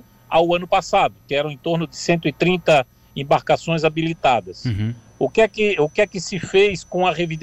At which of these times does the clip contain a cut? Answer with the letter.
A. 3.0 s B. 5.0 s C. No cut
C